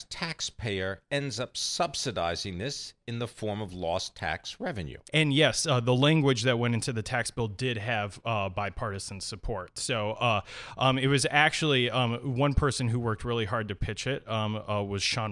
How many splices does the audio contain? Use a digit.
1